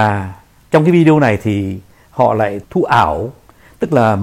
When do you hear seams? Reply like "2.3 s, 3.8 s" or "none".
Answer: 2.6 s